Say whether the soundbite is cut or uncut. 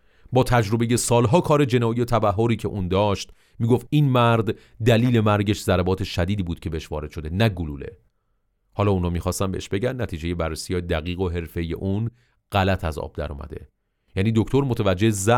uncut